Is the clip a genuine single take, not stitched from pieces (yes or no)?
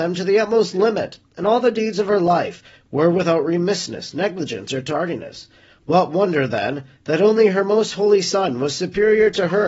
yes